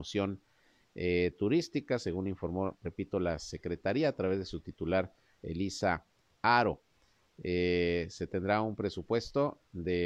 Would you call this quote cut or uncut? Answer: uncut